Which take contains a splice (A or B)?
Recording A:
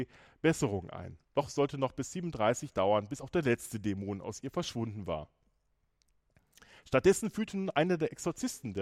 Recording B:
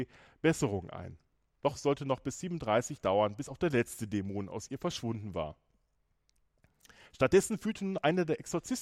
A